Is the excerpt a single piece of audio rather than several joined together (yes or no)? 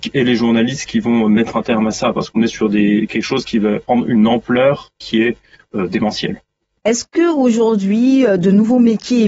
yes